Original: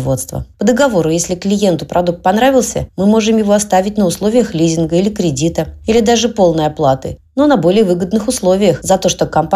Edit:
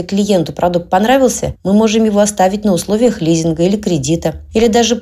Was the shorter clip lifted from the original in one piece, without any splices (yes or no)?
yes